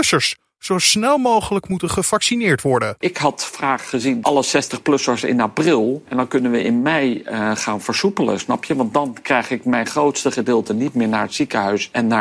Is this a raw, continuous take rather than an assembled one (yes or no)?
yes